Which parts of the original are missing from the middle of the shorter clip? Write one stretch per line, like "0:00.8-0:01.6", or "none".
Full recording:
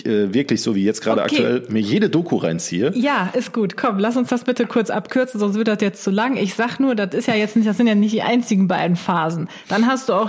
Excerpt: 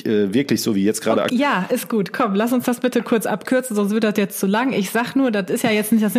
0:01.3-0:02.9